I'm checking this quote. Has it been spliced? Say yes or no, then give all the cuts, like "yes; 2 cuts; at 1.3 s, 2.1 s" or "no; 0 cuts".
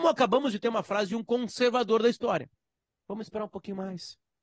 no; 0 cuts